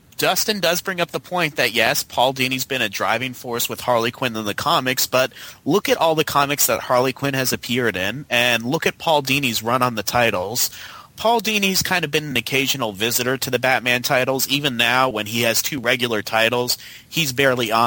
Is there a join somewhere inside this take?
no; 0 cuts

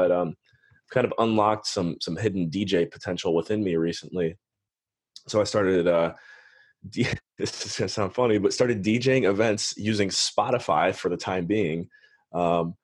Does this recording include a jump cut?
no; 0 cuts

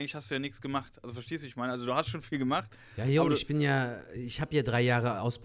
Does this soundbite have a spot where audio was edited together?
no; 0 cuts

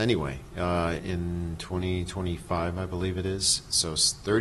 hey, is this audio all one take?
no; 1 cut; at 1.0 s

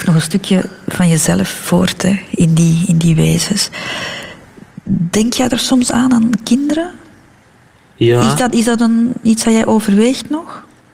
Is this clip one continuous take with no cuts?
yes; 0 cuts

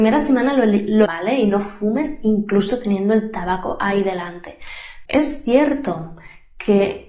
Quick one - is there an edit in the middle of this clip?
yes; 2 cuts; at 1.1 s, 5.1 s

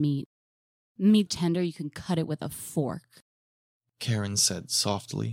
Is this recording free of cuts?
no; 1 cut; at 1.3 s

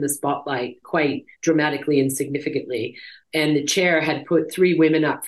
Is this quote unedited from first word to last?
no; 1 cut; at 1.3 s

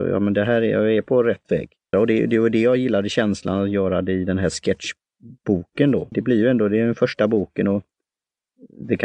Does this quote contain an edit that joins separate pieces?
yes; 2 cuts; at 1.9 s, 6.1 s

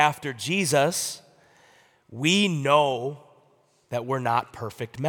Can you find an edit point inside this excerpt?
no; 0 cuts

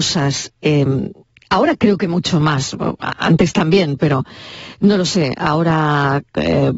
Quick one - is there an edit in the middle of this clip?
yes; 1 cut; at 4.0 s

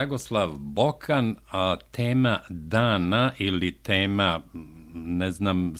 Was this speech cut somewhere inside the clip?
no; 0 cuts

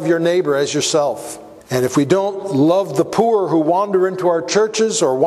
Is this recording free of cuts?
no; 1 cut; at 1.6 s

